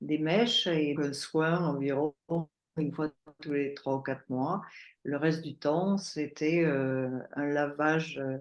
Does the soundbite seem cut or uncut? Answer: cut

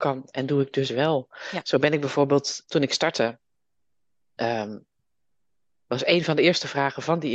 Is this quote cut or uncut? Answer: cut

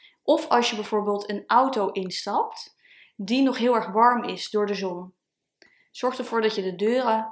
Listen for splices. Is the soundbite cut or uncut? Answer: uncut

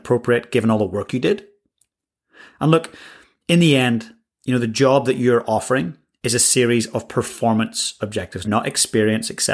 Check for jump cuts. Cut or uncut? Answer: cut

